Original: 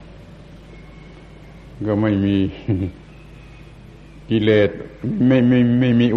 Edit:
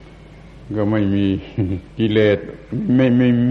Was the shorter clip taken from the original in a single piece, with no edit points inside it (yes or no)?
no